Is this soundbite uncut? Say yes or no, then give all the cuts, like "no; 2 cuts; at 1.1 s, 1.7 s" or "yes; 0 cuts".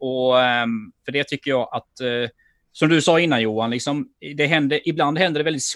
yes; 0 cuts